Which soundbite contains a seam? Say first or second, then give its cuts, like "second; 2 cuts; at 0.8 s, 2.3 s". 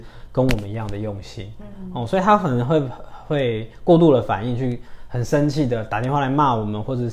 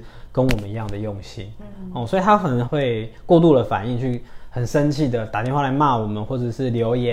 second; 1 cut; at 2.7 s